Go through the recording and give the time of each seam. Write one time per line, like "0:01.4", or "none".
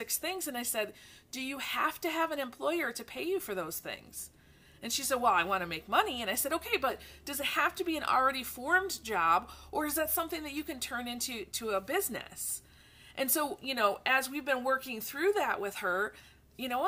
none